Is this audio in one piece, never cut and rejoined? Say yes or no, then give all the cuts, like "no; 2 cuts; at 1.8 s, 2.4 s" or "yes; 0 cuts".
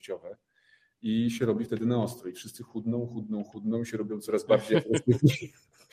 yes; 0 cuts